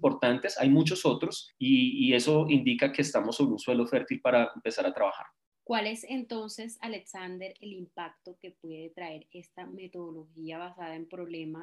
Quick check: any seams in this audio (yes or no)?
no